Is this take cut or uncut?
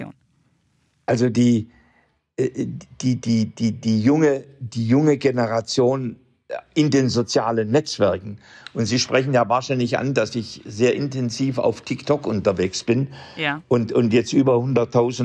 uncut